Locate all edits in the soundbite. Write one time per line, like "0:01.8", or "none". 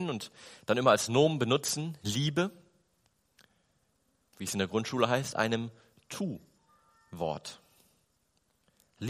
0:04.3